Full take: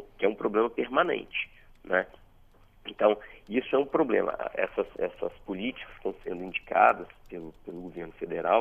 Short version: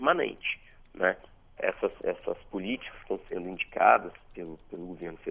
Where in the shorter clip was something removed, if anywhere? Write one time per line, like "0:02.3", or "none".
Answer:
0:01.6